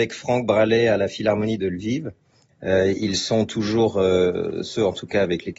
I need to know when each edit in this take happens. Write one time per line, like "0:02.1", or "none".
0:02.5